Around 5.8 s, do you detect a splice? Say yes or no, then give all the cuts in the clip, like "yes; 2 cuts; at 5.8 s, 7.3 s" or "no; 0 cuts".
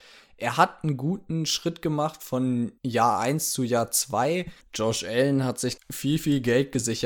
yes; 3 cuts; at 2.8 s, 4.6 s, 5.8 s